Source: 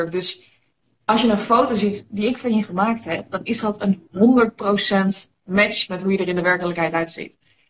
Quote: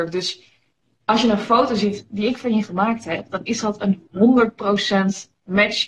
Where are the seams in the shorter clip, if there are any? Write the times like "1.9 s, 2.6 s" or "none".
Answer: none